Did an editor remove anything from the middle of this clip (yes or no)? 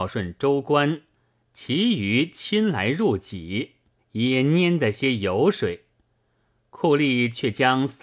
yes